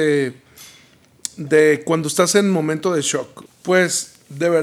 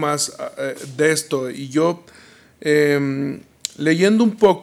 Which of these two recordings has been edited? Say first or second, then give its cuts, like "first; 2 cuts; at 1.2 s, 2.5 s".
first; 1 cut; at 3.5 s